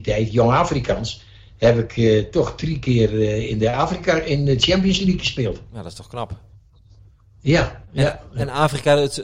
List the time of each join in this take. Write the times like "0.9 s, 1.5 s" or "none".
none